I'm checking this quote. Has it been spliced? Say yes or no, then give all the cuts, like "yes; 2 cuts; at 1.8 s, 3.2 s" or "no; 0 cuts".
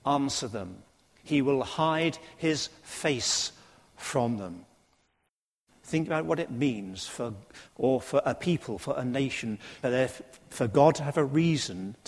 yes; 2 cuts; at 7.7 s, 9.8 s